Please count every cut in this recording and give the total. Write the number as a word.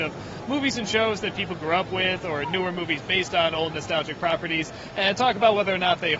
zero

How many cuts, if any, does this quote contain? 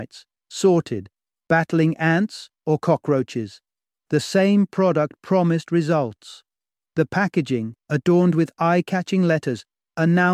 zero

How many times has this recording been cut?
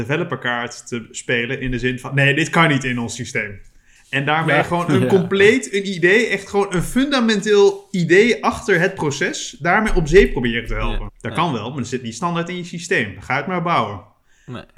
one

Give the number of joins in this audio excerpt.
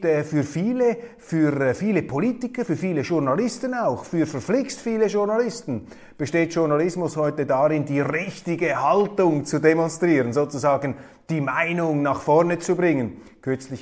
zero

